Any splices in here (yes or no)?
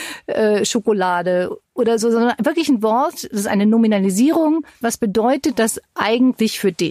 yes